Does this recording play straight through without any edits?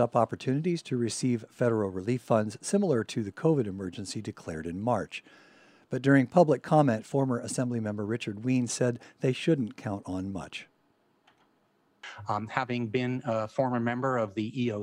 yes; 0 cuts

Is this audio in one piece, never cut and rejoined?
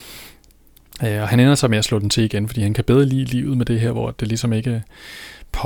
yes; 0 cuts

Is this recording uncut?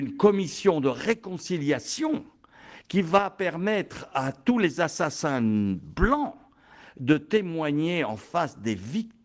yes; 0 cuts

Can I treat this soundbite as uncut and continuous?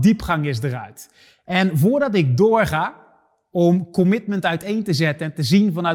yes; 0 cuts

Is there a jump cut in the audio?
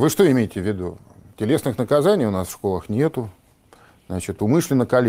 no; 0 cuts

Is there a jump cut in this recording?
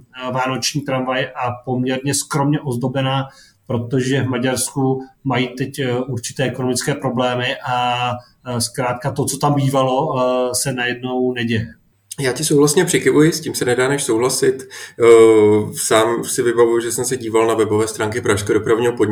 no; 0 cuts

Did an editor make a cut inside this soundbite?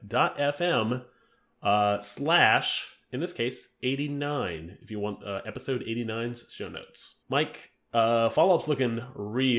yes; 1 cut; at 7.2 s

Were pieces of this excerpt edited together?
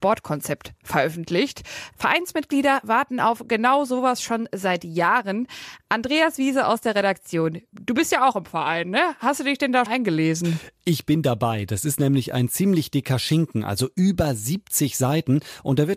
yes; 1 cut; at 9.9 s

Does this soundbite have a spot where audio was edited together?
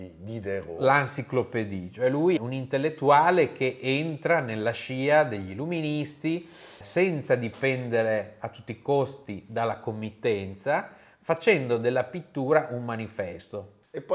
yes; 2 cuts; at 2.4 s, 6.8 s

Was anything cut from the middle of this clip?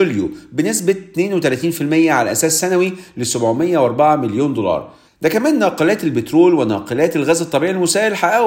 yes; 1 cut; at 5.1 s

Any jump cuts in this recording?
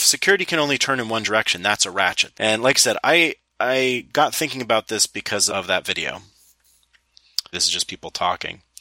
yes; 3 cuts; at 2.3 s, 5.5 s, 7.5 s

